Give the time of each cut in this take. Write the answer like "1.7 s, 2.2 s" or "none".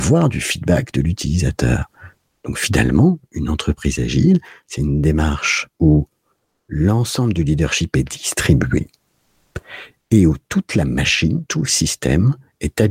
none